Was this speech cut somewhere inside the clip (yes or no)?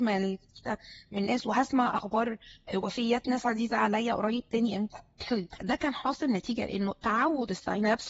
yes